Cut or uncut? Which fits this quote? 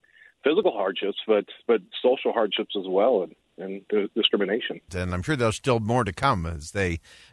cut